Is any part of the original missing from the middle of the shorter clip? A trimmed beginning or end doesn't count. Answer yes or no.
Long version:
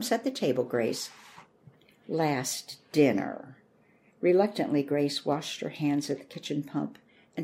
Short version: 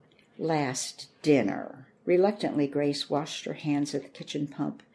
yes